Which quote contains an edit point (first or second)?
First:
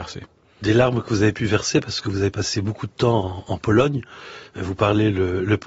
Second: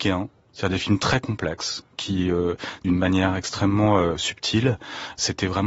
second